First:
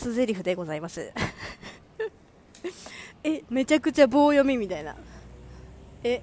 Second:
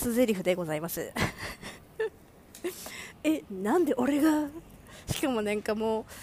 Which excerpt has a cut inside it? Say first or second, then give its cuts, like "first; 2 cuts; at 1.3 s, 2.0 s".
first; 1 cut; at 3.5 s